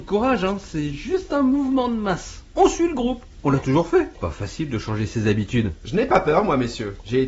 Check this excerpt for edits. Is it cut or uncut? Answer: uncut